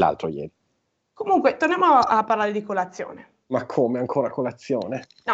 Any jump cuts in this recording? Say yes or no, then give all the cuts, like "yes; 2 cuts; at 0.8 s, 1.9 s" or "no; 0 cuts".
no; 0 cuts